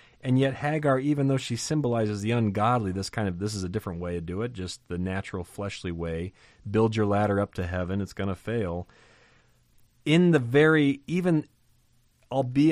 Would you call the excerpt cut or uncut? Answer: uncut